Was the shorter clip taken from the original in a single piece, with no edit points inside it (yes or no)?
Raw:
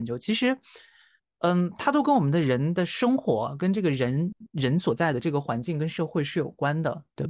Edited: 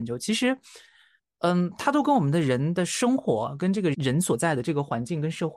no